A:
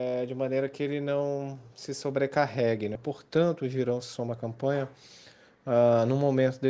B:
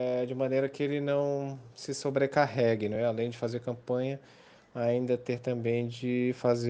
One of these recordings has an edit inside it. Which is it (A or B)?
A